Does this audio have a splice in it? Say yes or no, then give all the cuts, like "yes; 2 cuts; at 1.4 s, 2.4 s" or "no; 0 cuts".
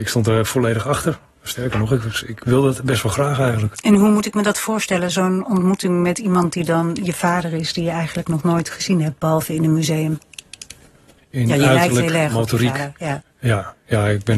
yes; 1 cut; at 11.2 s